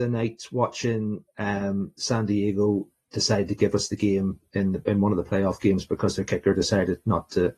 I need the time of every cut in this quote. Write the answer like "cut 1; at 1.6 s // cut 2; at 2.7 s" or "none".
none